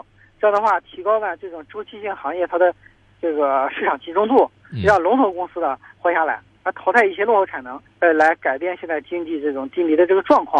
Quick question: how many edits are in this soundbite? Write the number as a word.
one